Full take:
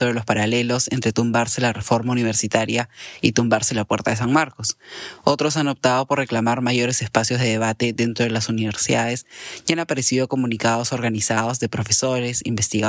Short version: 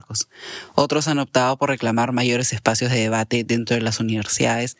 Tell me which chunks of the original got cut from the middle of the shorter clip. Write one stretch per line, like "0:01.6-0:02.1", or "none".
none